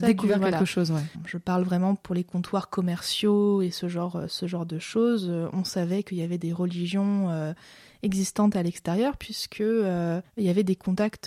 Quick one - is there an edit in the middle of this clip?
no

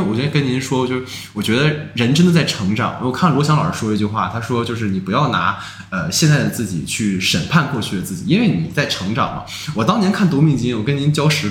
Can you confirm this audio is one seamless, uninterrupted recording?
yes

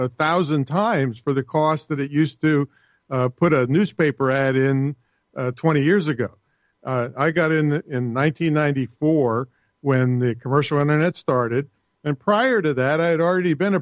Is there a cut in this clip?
no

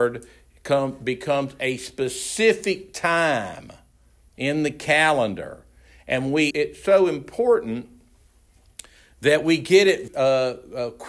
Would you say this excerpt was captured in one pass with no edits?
no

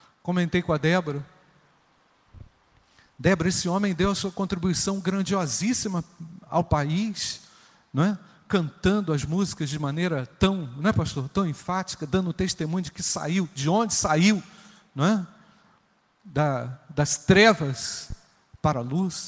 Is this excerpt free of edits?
yes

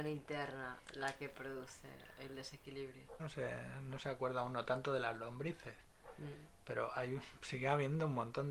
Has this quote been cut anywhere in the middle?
yes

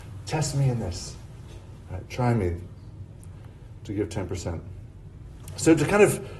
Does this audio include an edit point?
no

